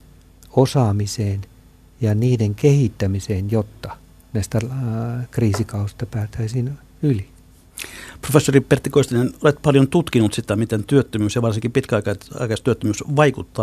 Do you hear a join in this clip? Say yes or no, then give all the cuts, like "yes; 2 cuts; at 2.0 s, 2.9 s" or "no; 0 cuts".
no; 0 cuts